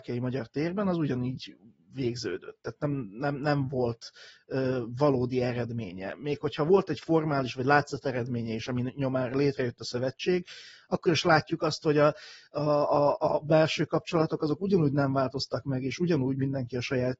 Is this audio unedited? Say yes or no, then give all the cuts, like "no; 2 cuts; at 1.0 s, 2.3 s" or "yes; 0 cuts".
yes; 0 cuts